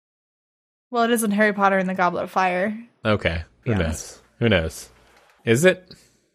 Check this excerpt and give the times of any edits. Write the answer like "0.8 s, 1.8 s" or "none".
3.6 s, 5.4 s